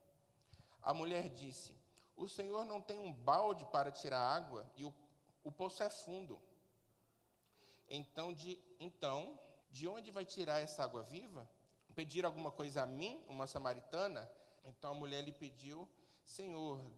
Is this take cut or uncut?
cut